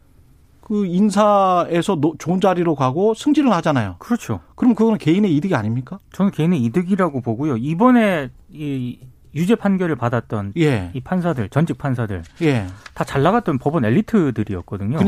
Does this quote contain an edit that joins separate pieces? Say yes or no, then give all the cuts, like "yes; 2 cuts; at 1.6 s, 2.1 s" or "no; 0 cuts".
no; 0 cuts